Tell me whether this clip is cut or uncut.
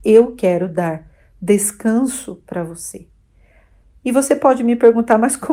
uncut